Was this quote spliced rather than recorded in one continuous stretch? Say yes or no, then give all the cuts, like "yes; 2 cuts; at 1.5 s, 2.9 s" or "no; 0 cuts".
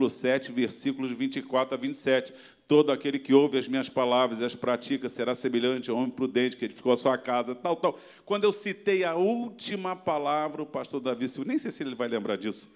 no; 0 cuts